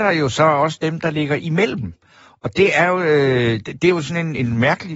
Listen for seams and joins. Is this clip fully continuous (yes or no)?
yes